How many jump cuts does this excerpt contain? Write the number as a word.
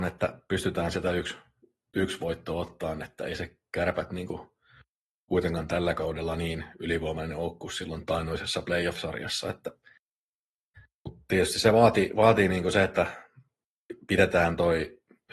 zero